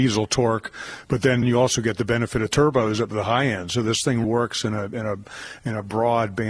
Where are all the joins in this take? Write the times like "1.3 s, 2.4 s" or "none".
1.4 s, 4.2 s

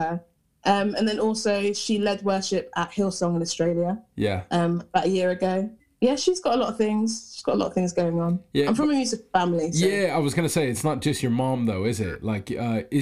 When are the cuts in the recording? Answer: 6.2 s

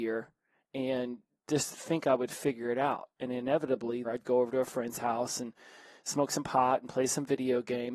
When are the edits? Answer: 4.0 s

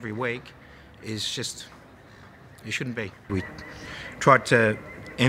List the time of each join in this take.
3.3 s

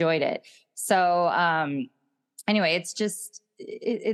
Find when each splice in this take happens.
none

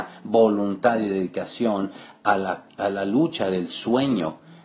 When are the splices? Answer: none

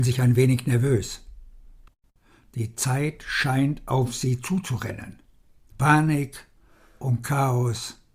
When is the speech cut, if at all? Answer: 5.7 s

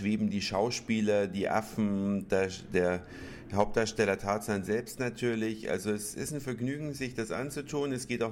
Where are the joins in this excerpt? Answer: none

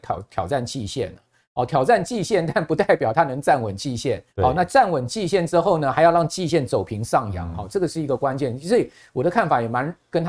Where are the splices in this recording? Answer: 4.3 s

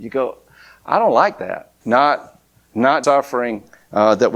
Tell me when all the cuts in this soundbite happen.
1.8 s, 3.0 s

